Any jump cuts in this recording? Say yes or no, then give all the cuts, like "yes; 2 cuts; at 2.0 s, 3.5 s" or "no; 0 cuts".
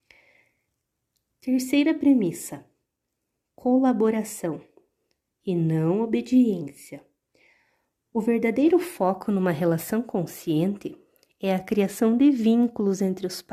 no; 0 cuts